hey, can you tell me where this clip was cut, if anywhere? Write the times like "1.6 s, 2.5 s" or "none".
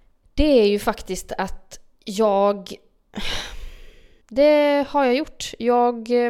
4.2 s